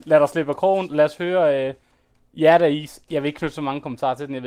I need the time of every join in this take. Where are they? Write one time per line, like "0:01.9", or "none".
none